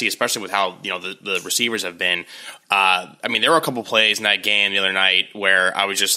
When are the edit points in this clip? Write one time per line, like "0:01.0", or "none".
none